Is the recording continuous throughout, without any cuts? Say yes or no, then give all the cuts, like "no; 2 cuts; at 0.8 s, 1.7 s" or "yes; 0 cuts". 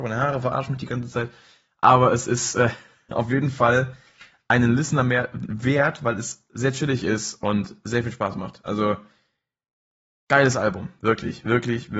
yes; 0 cuts